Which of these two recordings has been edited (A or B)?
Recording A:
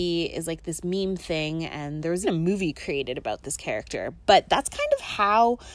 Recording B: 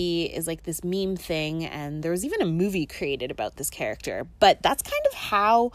A